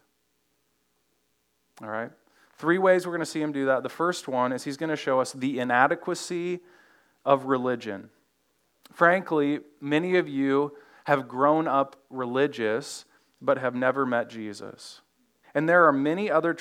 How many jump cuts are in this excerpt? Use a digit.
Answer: 1